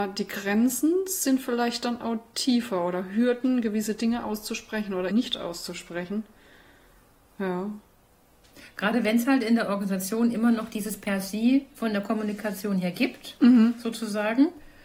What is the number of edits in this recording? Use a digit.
1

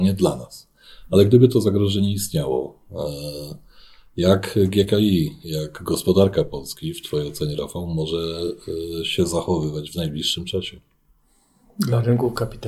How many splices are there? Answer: 0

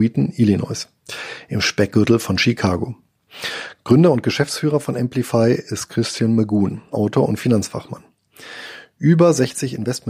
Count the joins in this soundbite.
1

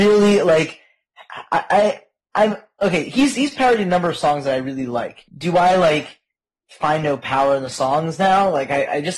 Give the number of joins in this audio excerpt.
1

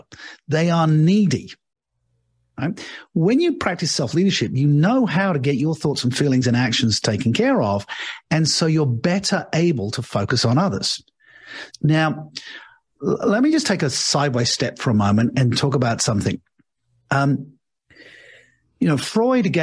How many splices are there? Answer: 2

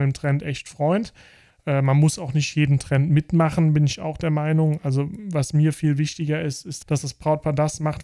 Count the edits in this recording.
2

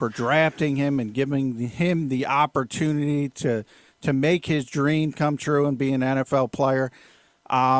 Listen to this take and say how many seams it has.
0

